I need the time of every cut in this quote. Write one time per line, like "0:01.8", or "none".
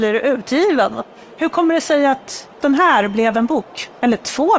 0:02.6